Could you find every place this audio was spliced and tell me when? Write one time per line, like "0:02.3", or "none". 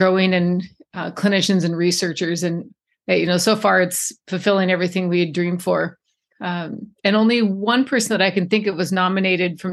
0:06.3